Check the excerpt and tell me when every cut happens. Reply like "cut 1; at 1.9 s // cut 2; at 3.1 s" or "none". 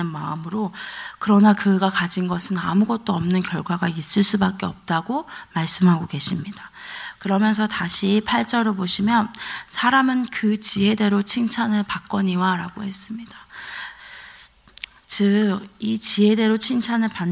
cut 1; at 7.2 s